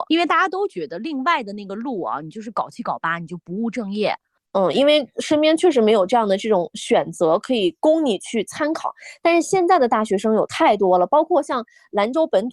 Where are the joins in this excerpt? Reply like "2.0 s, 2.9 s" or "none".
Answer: 4.4 s